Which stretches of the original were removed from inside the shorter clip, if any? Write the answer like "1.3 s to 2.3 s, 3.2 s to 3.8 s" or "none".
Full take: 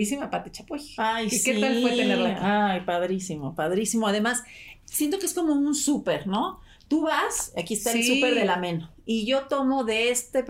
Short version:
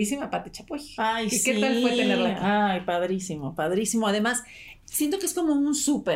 none